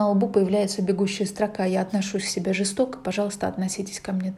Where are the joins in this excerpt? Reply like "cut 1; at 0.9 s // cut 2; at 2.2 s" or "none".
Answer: none